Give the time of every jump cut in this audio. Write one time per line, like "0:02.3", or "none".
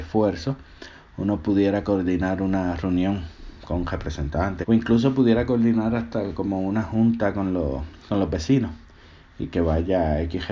0:04.6

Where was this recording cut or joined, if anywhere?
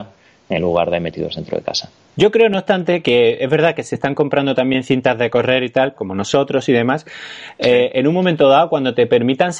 0:02.1
0:06.0

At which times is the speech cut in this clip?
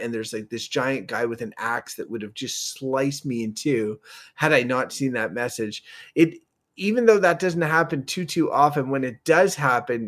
none

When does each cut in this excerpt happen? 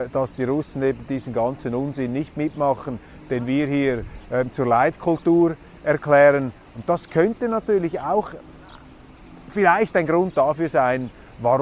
none

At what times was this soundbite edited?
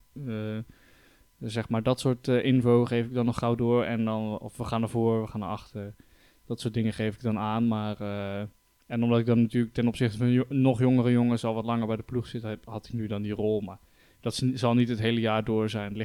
none

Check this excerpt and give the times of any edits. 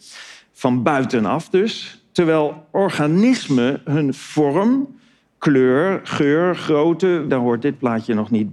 0:07.3

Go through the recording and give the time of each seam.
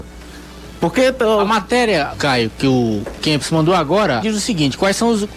0:02.1
0:04.2

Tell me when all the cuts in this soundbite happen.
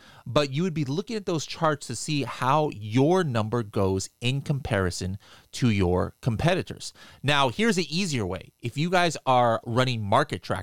0:09.6

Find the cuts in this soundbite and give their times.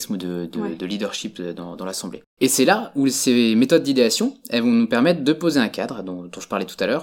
0:02.3

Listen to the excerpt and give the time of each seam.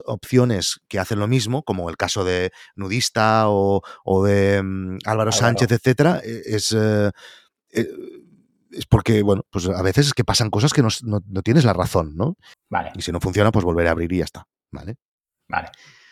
0:12.5

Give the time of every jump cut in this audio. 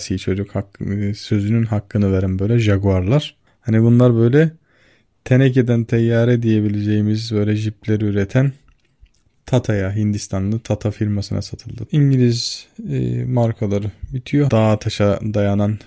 0:11.9
0:14.5

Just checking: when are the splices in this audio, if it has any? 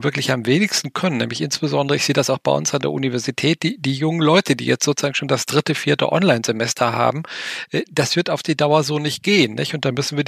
none

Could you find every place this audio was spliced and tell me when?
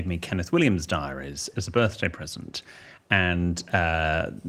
none

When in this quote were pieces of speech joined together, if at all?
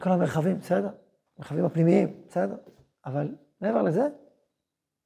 none

